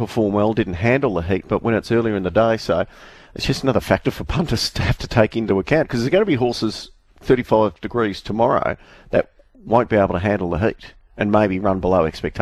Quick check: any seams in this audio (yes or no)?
no